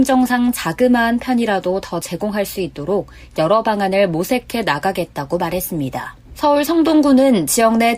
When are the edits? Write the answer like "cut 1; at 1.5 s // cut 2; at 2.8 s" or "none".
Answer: cut 1; at 6.2 s